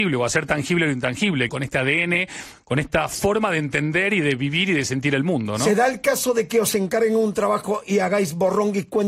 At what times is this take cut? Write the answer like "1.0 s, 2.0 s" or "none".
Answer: 1.5 s